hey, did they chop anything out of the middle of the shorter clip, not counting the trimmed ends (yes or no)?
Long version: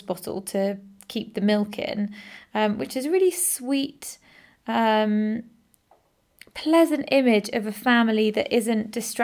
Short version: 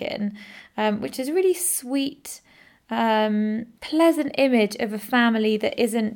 yes